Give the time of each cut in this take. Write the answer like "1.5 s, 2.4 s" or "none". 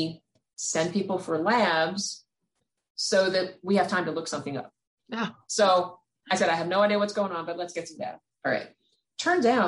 5.4 s